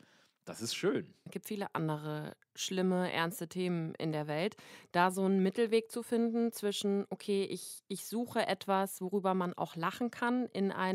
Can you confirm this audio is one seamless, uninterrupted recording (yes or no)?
no